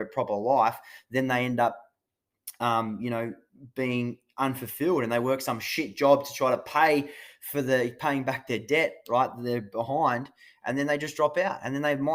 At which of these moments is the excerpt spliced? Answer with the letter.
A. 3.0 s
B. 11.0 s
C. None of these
C